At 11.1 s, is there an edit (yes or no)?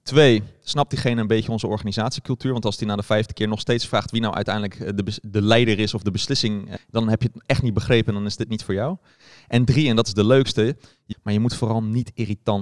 yes